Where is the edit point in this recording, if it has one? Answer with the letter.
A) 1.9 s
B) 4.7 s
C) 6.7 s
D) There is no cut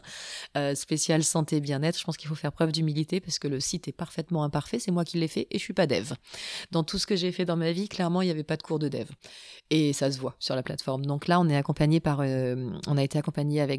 D